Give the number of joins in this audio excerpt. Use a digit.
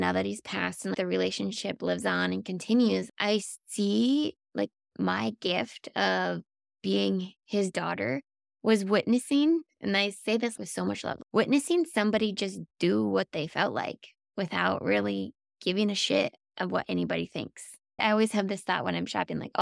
2